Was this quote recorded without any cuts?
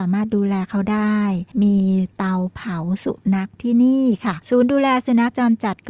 yes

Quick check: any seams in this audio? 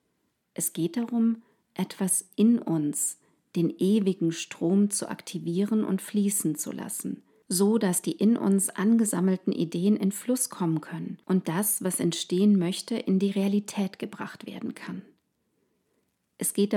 no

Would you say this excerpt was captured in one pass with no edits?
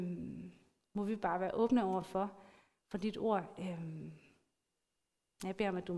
yes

